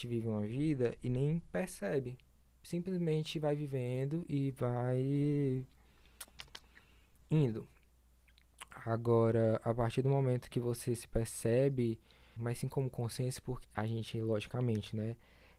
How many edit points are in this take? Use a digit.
2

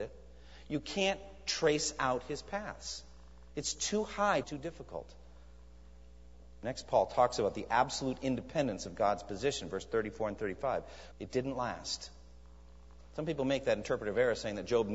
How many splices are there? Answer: 2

